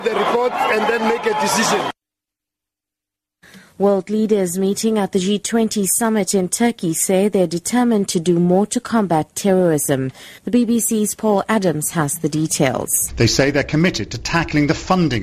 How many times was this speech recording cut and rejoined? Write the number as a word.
two